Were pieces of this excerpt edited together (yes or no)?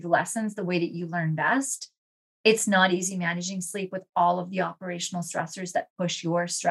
yes